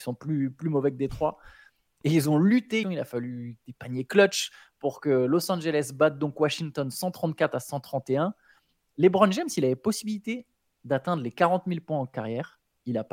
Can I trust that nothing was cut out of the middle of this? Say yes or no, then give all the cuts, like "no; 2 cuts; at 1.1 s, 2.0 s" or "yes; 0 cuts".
no; 1 cut; at 2.8 s